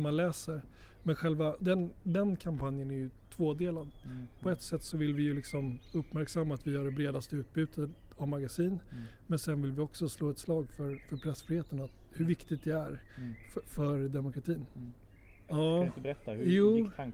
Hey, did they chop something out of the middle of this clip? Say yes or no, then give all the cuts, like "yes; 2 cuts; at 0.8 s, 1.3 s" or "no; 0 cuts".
yes; 2 cuts; at 1.6 s, 15.5 s